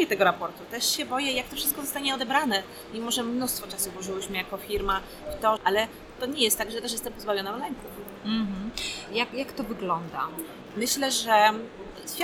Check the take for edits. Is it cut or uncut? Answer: cut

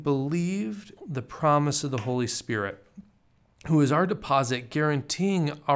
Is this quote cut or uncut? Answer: cut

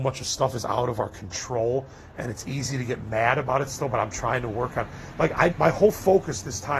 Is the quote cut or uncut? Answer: cut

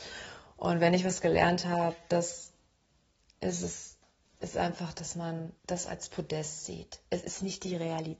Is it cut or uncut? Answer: cut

